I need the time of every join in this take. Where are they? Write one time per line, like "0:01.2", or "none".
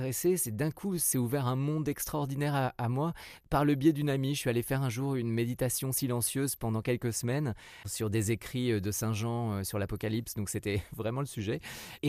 none